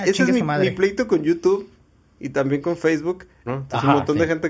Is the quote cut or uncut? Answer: cut